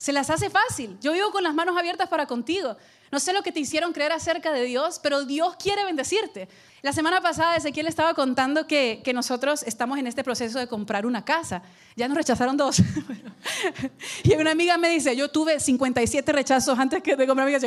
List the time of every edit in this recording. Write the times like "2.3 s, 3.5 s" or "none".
6.7 s